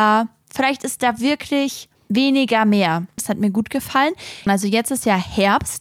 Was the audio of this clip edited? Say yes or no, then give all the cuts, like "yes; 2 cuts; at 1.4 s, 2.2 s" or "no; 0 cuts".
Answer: yes; 2 cuts; at 3.2 s, 4.5 s